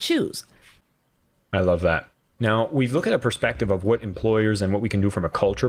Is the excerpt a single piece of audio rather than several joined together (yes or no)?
yes